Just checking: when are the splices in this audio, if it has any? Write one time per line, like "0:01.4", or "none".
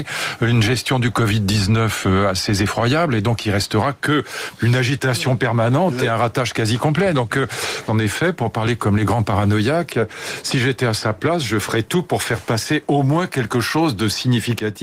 0:07.9